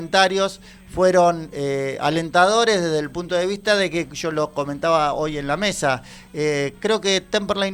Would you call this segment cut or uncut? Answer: uncut